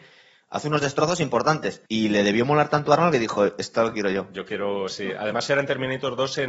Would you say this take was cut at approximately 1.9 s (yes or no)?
yes